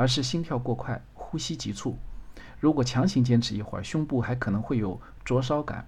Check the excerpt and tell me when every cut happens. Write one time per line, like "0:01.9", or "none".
none